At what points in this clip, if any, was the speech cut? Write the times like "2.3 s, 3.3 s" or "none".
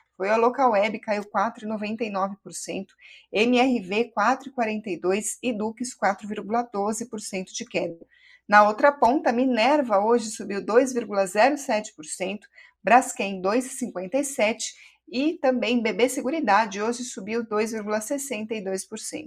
none